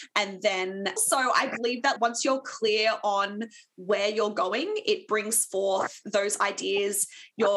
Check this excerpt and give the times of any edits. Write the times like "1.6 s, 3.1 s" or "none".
1.0 s, 2.0 s

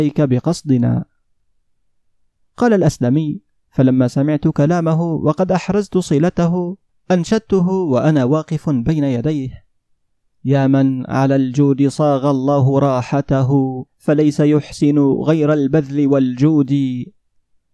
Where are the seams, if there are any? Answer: 13.9 s

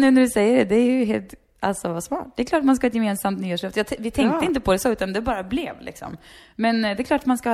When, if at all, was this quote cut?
none

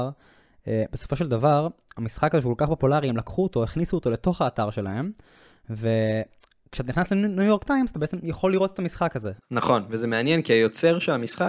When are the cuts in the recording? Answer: 9.4 s

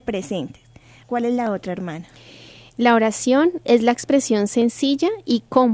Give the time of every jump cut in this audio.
1.0 s

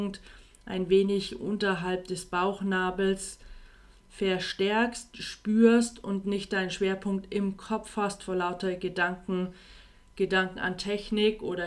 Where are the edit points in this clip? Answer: none

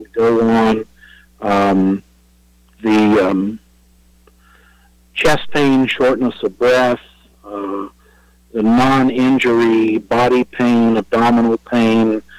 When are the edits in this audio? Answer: none

